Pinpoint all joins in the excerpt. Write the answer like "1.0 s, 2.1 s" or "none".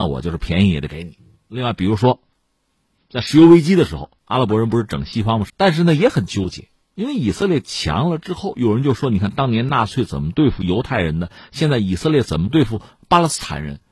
5.5 s